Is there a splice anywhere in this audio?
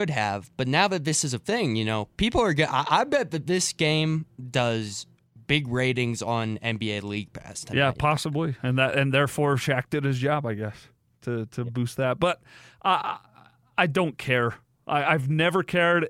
no; 0 cuts

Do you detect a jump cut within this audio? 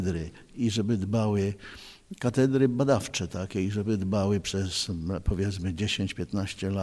no; 0 cuts

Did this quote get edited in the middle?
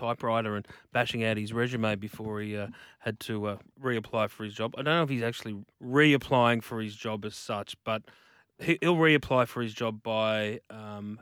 yes; 1 cut; at 5.7 s

